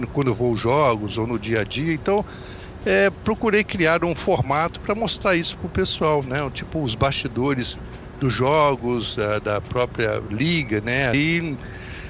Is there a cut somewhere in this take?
yes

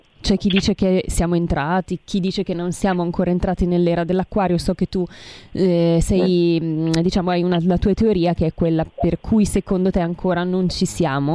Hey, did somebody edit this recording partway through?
no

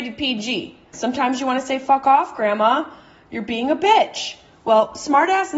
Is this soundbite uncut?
no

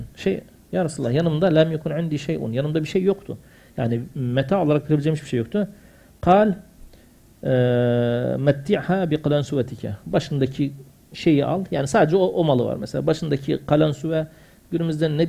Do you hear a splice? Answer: no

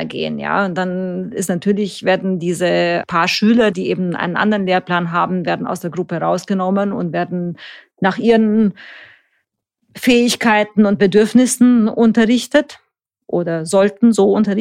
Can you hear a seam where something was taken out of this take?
yes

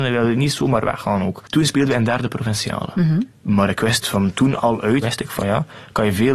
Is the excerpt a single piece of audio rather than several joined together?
no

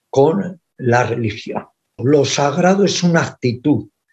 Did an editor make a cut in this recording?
yes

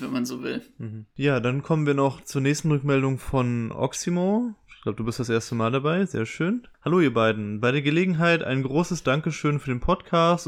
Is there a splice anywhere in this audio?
no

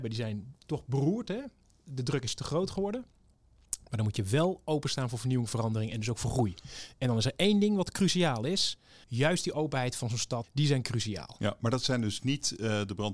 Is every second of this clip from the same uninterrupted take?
no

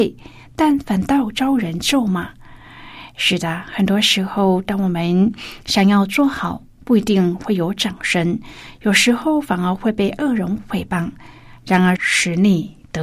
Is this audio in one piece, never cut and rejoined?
no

